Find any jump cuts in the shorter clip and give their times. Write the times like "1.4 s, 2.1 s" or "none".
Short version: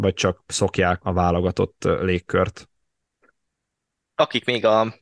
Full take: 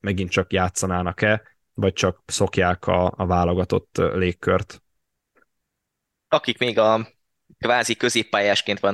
1.0 s